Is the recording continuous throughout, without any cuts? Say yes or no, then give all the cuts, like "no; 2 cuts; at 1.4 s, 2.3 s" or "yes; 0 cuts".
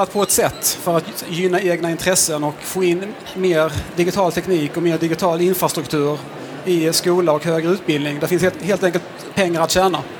yes; 0 cuts